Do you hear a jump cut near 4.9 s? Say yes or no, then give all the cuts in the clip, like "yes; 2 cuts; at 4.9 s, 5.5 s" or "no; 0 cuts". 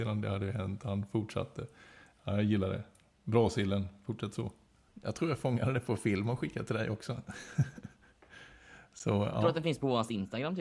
yes; 1 cut; at 4.9 s